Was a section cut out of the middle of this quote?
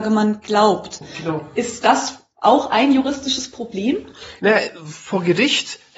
no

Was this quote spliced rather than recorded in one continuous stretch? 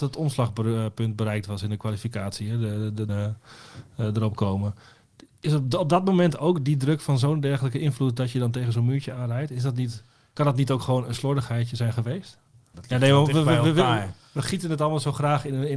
yes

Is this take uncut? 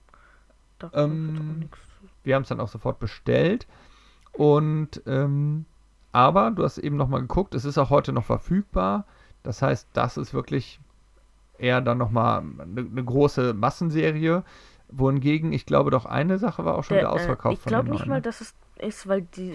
no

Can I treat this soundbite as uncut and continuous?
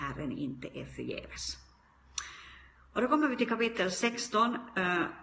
yes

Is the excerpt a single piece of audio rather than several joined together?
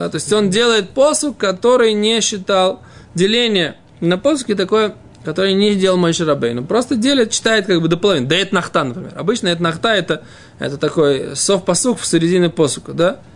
yes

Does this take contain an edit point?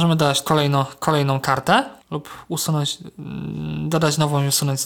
yes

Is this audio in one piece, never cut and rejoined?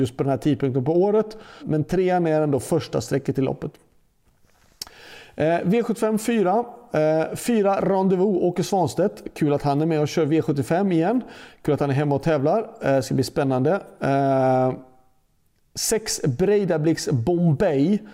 no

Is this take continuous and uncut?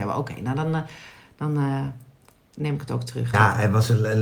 no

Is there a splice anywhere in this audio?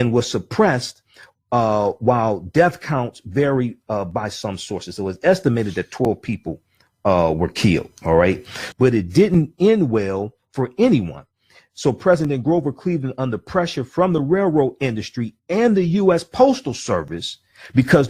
yes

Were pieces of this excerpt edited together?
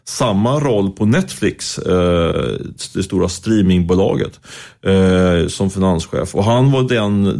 no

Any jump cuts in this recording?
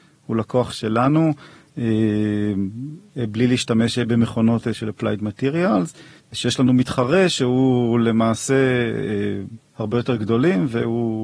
yes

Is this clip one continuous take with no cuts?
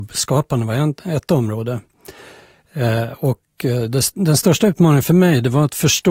yes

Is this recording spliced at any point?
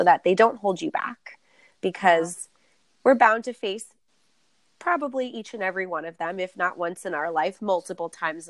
no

